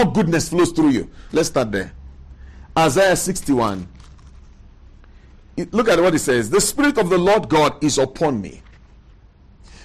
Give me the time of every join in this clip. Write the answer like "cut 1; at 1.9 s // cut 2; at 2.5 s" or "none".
cut 1; at 1.3 s